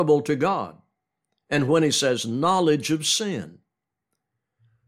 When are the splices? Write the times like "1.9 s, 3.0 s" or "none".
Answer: none